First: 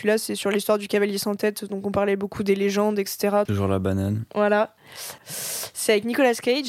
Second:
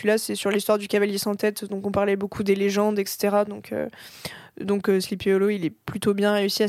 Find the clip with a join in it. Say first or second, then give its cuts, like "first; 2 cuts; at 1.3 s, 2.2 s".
first; 2 cuts; at 3.5 s, 5.2 s